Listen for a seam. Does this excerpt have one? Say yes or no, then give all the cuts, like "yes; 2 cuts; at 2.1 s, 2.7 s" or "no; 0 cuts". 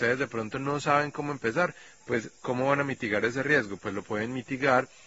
no; 0 cuts